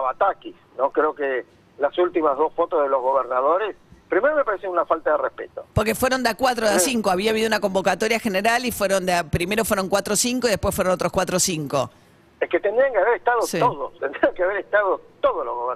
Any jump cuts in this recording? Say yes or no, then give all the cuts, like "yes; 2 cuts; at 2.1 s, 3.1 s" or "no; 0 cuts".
yes; 2 cuts; at 5.7 s, 14.0 s